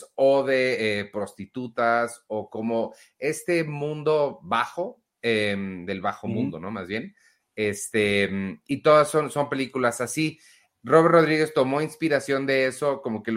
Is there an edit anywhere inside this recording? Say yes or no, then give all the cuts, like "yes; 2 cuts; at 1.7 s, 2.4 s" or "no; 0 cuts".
no; 0 cuts